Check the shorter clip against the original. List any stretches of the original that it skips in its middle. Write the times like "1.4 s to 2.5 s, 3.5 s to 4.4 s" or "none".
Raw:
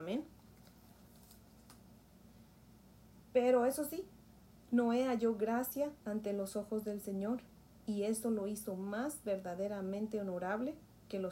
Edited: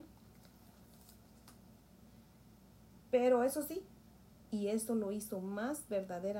4.6 s to 7.7 s